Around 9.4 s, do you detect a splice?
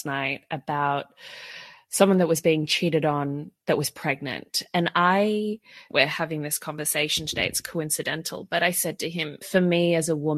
yes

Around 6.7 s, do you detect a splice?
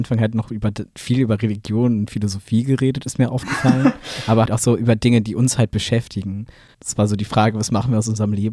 yes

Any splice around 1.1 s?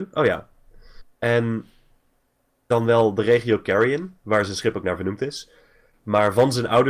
no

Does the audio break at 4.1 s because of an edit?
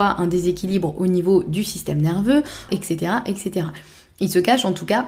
no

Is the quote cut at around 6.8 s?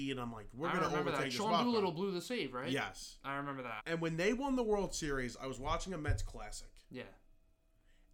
no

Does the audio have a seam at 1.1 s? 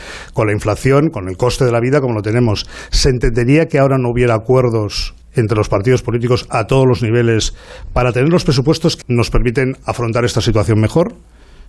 no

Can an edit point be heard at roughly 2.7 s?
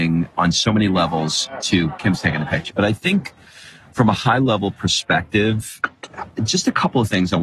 yes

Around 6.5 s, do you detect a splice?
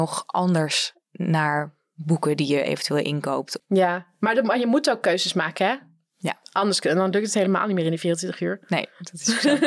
no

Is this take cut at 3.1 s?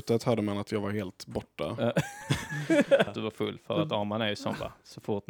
yes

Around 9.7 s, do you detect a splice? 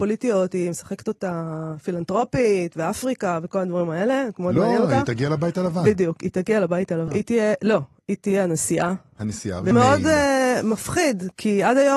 yes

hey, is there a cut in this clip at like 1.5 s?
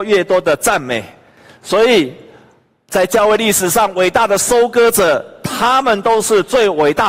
no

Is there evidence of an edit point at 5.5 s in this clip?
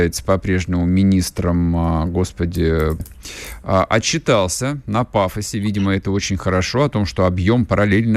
no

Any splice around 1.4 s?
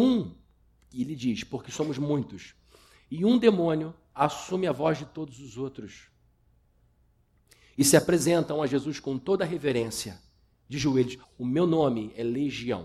no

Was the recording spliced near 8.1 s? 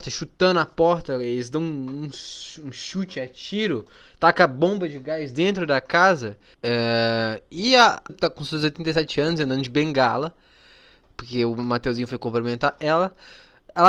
yes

